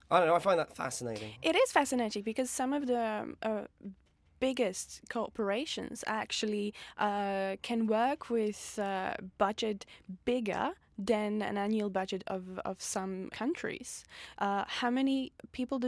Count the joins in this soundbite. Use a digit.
2